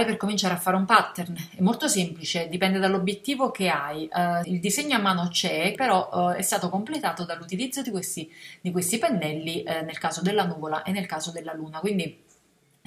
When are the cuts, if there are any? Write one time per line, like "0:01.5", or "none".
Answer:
0:04.4
0:05.7